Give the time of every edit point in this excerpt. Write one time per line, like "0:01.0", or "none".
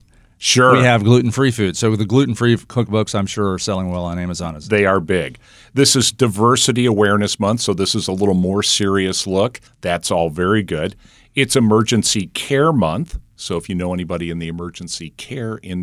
0:09.7